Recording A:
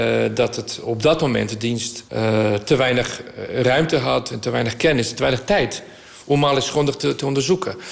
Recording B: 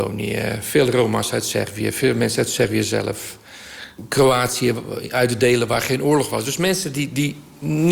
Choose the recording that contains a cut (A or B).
A